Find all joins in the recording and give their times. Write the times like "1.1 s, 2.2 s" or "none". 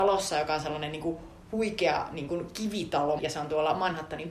3.2 s